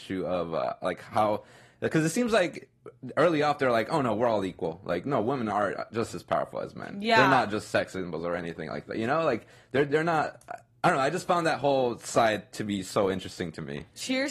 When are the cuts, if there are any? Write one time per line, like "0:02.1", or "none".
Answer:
none